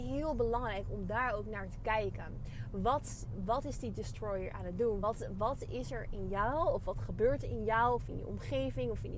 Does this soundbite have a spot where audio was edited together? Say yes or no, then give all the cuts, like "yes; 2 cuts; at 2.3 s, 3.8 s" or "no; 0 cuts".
no; 0 cuts